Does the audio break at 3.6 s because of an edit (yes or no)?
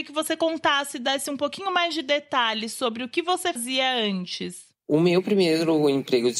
yes